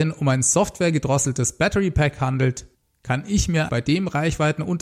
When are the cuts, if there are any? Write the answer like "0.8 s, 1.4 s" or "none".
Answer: 3.7 s